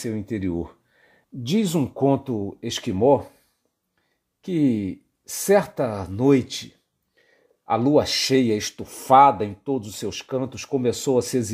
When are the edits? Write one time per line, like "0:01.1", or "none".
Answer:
0:01.2